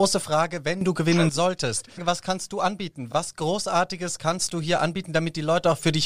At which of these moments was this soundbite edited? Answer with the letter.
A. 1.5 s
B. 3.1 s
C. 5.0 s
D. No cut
D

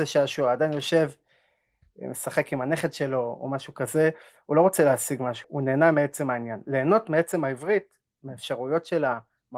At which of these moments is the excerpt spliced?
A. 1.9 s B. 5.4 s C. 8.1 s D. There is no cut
B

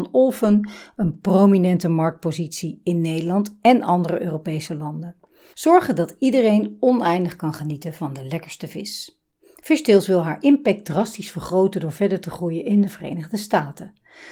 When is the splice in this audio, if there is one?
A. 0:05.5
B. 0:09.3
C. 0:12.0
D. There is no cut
A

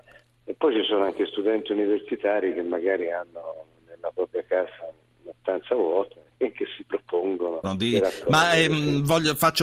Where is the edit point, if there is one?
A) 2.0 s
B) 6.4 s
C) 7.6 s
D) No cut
C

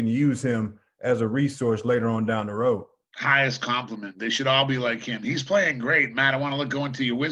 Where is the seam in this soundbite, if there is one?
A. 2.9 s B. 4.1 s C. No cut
C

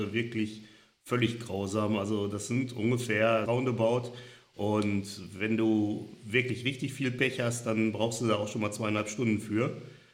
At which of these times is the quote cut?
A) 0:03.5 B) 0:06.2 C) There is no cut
A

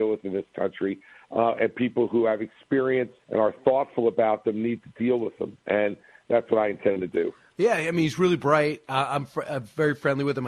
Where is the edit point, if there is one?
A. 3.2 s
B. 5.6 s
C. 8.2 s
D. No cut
A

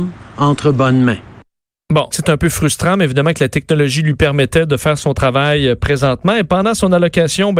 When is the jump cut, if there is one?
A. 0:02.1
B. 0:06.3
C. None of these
A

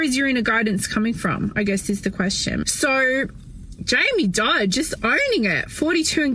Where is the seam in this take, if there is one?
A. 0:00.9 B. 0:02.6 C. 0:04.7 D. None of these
B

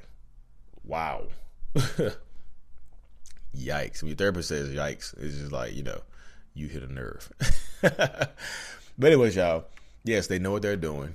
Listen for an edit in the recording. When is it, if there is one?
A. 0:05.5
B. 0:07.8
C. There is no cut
C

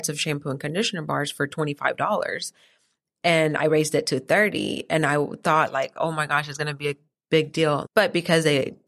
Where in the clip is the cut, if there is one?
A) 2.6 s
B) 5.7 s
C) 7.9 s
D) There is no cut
C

